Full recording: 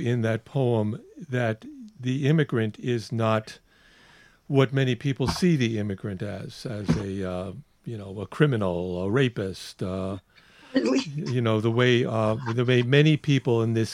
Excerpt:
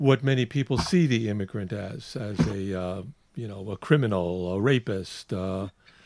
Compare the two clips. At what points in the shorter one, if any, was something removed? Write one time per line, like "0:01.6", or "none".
none